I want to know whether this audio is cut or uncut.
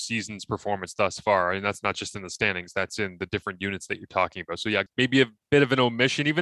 cut